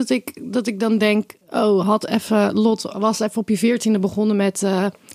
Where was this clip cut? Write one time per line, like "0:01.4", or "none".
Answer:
none